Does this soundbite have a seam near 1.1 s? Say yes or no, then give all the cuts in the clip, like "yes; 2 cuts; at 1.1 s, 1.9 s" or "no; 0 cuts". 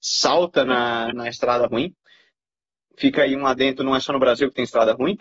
yes; 1 cut; at 1.1 s